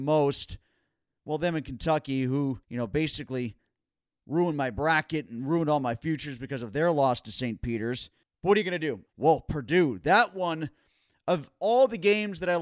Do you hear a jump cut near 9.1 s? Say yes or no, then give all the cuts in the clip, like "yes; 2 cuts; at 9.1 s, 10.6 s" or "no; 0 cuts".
yes; 2 cuts; at 2.6 s, 9.1 s